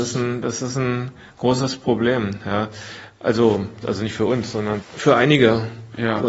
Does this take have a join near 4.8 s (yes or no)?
yes